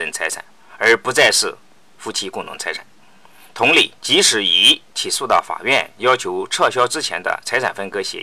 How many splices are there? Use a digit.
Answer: 1